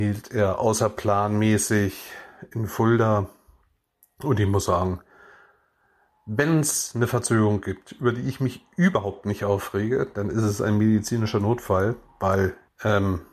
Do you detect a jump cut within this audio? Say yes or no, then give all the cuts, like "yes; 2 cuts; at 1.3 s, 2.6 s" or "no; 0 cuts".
no; 0 cuts